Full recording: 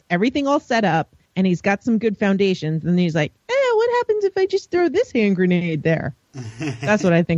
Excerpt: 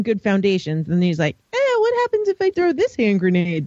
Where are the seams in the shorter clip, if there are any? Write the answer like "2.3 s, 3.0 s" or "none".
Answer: 2.5 s